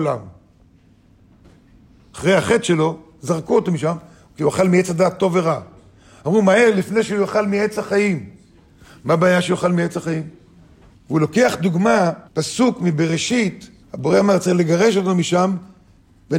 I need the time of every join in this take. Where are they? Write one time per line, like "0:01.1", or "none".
0:10.9
0:12.3
0:13.8